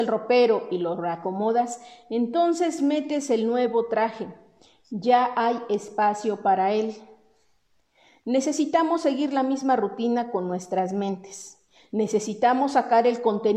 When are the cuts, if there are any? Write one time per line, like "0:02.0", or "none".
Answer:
none